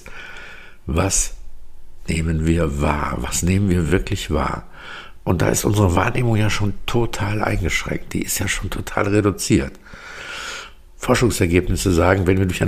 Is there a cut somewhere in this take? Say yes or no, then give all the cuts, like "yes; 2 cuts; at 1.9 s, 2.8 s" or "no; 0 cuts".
no; 0 cuts